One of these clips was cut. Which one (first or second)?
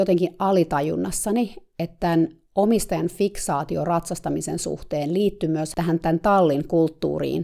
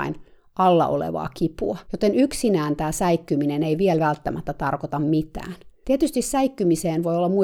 second